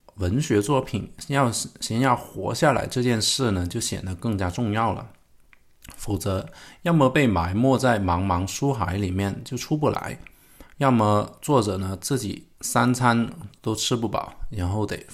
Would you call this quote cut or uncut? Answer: uncut